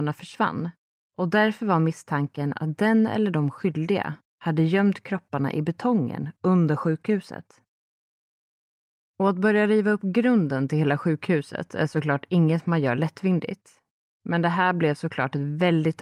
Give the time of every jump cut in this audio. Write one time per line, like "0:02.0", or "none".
none